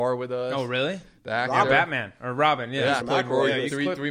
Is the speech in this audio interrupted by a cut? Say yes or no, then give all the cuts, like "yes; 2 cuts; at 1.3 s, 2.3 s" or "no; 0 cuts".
yes; 1 cut; at 3.0 s